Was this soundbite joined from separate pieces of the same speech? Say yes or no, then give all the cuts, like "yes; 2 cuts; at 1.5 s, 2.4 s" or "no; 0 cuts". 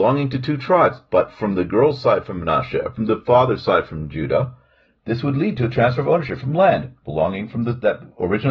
no; 0 cuts